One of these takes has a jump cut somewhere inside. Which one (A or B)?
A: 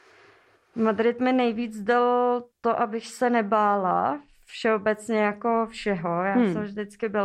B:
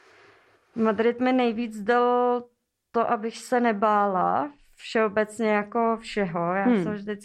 A